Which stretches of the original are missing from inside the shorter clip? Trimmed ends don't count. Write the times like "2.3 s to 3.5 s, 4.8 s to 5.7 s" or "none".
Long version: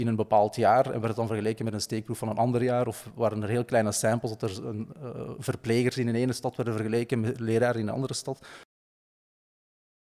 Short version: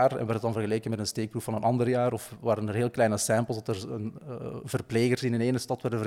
none